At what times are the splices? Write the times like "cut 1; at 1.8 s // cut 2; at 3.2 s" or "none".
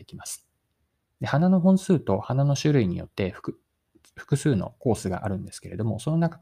none